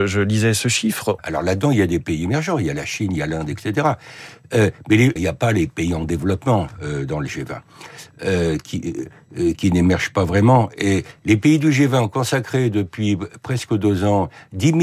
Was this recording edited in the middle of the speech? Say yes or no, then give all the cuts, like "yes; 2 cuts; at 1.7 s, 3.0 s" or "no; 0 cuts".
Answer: yes; 2 cuts; at 1.2 s, 5.2 s